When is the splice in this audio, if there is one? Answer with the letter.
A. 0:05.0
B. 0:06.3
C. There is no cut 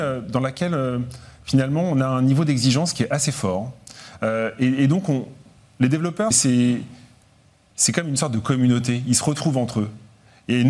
B